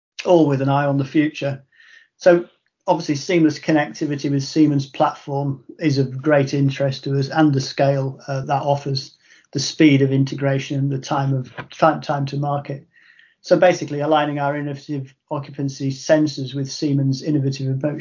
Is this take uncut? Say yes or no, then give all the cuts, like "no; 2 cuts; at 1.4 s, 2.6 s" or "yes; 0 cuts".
no; 1 cut; at 8.4 s